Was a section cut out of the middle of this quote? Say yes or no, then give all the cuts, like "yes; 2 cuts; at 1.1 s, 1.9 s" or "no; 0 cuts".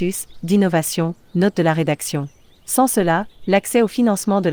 no; 0 cuts